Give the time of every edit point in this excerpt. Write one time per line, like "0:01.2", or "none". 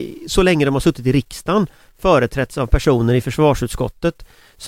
none